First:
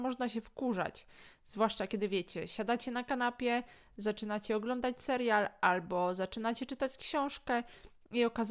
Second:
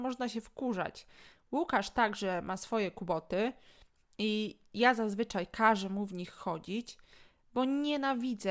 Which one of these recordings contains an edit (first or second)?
second